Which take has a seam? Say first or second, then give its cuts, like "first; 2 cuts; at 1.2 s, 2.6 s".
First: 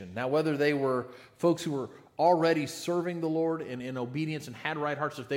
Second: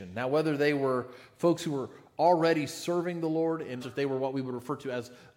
second; 1 cut; at 3.8 s